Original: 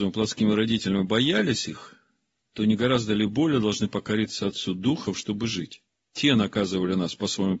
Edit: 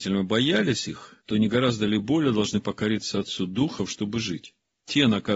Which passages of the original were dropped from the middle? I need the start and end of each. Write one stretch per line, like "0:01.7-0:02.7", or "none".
0:02.0-0:02.5